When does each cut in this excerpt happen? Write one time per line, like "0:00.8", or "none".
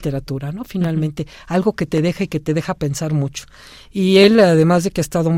none